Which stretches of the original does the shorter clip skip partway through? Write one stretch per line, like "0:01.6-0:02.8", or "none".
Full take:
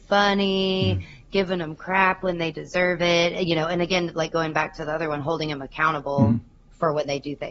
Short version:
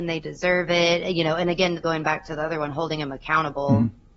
0:04.1-0:04.3